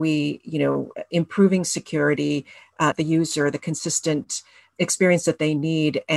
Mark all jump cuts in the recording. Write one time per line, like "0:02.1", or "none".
0:02.9
0:04.7